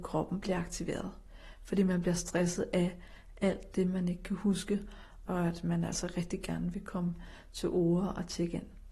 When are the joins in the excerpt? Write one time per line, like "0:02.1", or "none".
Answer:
0:05.3